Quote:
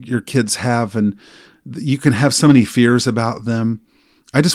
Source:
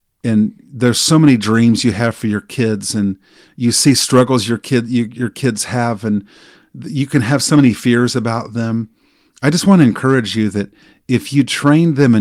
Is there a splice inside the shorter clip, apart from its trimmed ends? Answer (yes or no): no